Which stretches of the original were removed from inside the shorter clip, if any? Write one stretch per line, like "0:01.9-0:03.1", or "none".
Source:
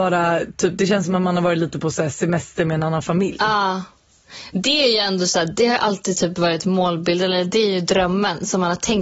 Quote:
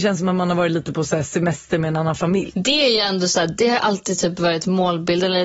0:03.4-0:04.5